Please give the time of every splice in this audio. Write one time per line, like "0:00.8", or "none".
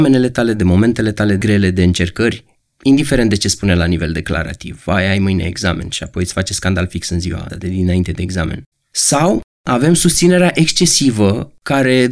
0:07.5
0:08.7